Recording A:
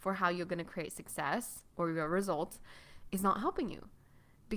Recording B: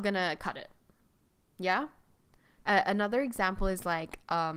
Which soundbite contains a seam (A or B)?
B